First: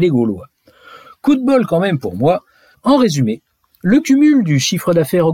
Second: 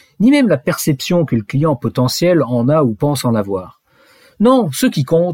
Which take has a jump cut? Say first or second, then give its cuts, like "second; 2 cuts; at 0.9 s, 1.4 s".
first; 1 cut; at 2.7 s